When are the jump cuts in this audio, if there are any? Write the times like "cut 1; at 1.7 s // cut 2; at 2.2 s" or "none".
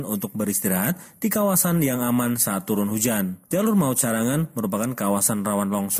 none